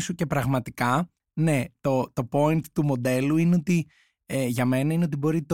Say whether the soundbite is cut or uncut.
uncut